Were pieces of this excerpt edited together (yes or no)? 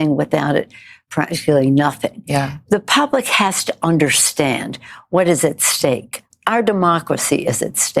no